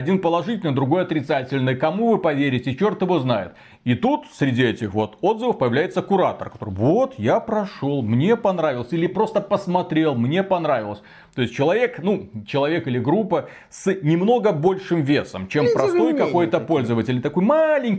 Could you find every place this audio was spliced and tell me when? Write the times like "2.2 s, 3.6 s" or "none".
none